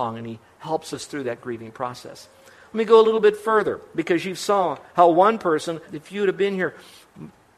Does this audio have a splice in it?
yes; 1 cut; at 5.8 s

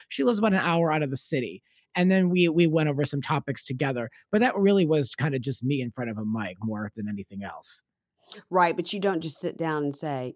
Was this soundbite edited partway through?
no; 0 cuts

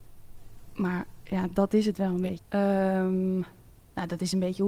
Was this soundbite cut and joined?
yes; 1 cut; at 2.4 s

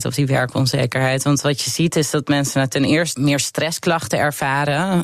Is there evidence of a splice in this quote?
yes; 1 cut; at 3.1 s

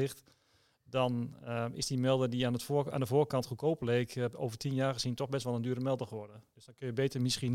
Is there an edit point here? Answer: no; 0 cuts

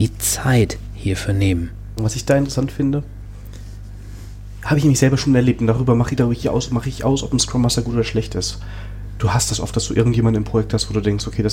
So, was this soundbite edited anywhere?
yes; 1 cut; at 2.0 s

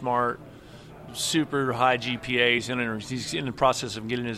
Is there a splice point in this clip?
no; 0 cuts

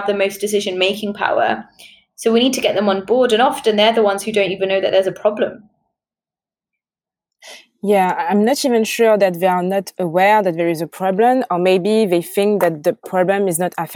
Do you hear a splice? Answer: no; 0 cuts

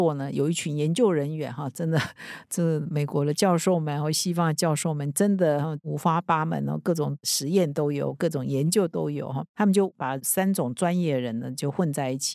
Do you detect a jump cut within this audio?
no; 0 cuts

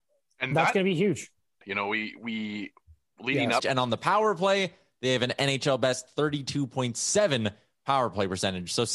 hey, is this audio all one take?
no; 2 cuts; at 1.6 s, 3.6 s

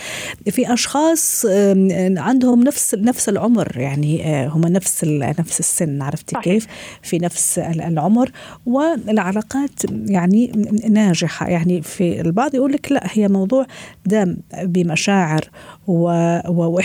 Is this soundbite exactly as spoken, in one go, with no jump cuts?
yes; 0 cuts

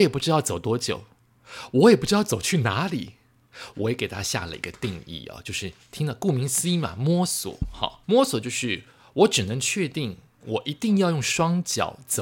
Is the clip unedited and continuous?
no; 2 cuts; at 3.7 s, 8.0 s

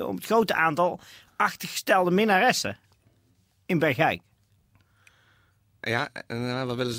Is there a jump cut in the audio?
no; 0 cuts

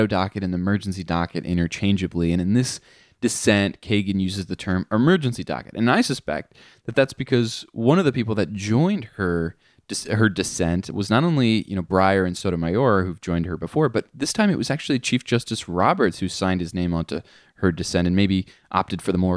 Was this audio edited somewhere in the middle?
no; 0 cuts

